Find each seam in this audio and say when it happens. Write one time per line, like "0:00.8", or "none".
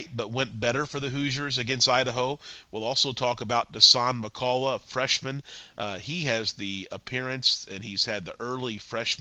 none